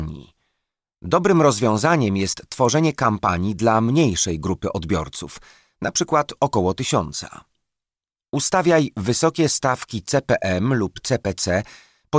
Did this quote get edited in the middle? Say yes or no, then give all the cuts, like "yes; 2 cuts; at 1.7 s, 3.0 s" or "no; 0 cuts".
no; 0 cuts